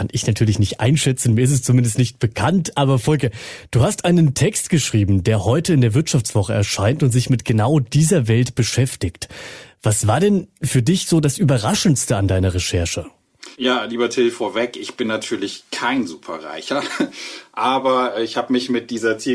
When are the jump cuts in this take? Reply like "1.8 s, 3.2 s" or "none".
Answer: 13.5 s

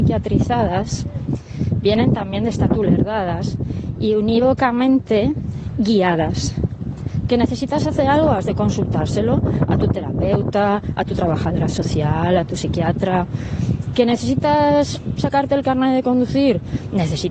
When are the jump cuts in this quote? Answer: 2.7 s

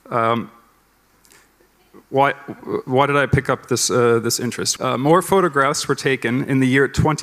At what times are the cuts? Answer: 4.8 s

